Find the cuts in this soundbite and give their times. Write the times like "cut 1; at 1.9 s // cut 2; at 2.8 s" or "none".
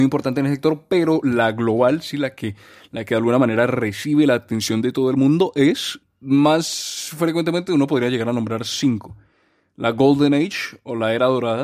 cut 1; at 6.0 s